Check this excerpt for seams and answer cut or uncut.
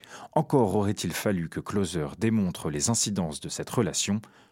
uncut